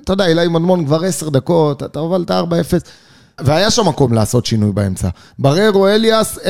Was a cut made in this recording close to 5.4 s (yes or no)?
no